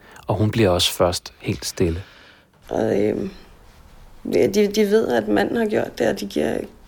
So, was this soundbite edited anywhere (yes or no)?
yes